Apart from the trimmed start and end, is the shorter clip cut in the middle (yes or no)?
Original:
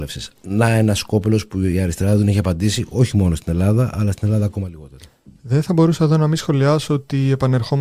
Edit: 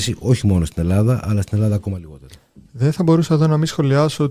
no